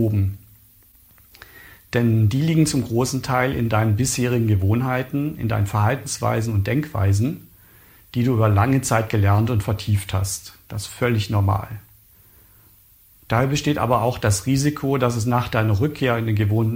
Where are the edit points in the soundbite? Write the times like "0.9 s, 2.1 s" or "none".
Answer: none